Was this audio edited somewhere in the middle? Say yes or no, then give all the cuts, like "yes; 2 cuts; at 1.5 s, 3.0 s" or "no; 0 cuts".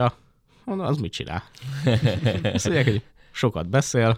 no; 0 cuts